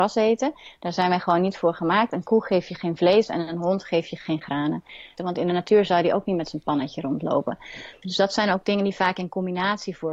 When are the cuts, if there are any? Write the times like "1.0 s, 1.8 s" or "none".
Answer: 5.2 s, 8.0 s